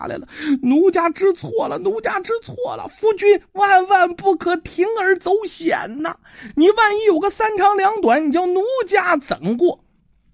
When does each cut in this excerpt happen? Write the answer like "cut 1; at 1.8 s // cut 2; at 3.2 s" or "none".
none